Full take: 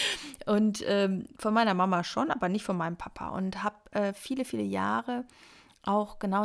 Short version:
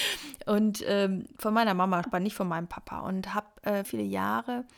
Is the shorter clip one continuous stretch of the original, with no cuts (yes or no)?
no